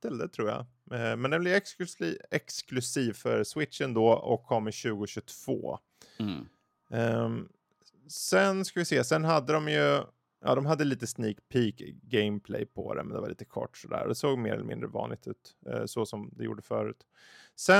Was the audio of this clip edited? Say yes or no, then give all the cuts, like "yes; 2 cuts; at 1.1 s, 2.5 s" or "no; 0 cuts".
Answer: no; 0 cuts